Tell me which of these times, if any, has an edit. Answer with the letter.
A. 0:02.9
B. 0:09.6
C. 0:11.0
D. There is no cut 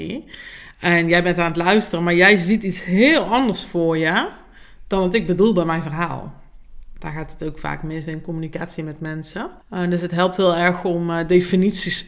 B